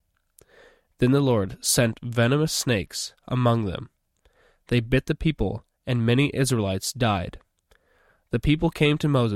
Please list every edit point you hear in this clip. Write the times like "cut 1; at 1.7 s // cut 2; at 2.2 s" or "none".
none